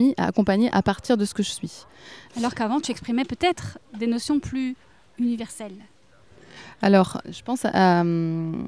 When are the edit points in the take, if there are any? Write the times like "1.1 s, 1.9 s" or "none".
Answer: 2.3 s